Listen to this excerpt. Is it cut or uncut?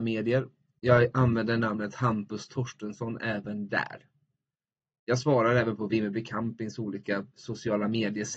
uncut